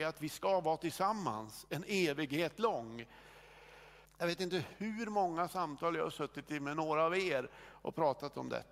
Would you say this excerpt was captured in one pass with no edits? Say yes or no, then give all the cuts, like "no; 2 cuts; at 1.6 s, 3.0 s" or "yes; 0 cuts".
no; 1 cut; at 4.1 s